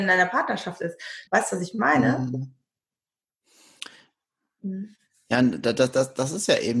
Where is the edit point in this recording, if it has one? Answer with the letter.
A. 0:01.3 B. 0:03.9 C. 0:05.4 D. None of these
A